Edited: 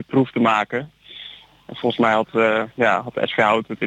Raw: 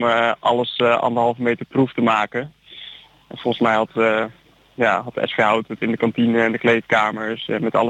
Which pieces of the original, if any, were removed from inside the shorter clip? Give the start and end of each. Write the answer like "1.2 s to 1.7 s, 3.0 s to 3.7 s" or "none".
4.3 s to 4.7 s